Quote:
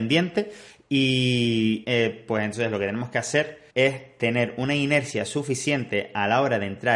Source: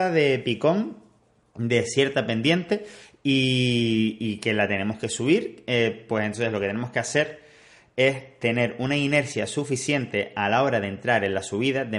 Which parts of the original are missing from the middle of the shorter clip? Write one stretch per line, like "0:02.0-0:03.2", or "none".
0:04.2-0:05.6
0:07.5-0:07.9